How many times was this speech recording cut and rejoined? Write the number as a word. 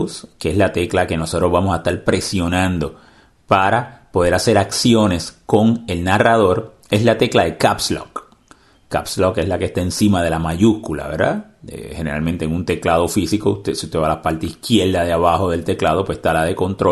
zero